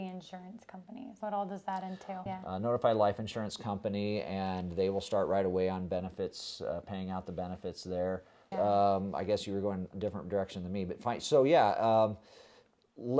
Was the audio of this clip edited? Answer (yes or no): yes